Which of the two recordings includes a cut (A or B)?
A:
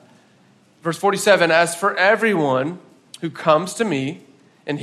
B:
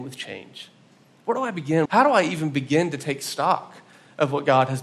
B